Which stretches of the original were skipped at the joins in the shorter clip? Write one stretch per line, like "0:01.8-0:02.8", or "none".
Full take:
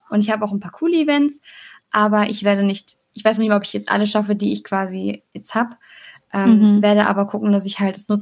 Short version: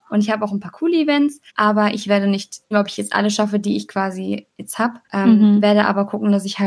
0:01.5-0:01.8
0:03.1-0:03.5
0:05.8-0:06.2